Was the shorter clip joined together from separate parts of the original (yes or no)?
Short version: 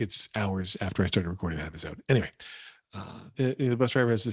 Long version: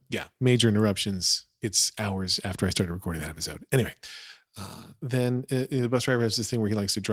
yes